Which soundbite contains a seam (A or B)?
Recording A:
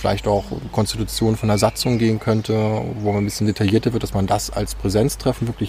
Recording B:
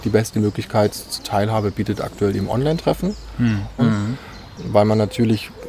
B